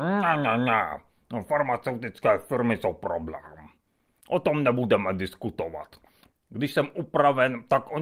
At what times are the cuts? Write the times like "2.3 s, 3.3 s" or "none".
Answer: 4.2 s, 6.3 s